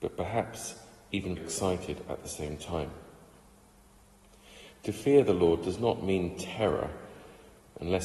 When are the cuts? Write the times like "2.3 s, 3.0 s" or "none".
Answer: 1.4 s